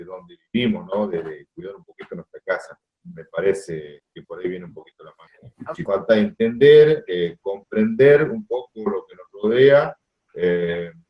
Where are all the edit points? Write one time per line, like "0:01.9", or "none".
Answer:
0:05.9